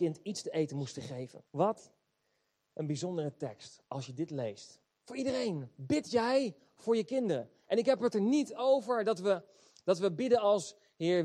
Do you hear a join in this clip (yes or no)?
yes